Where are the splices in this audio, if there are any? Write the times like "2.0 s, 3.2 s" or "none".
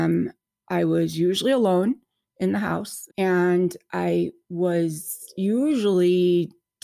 3.1 s